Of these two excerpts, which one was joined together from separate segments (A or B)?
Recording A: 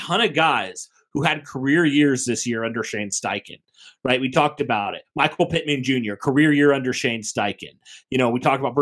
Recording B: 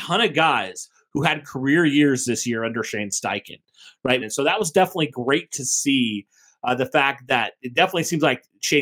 B